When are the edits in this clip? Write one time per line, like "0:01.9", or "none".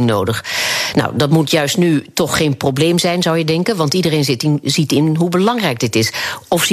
none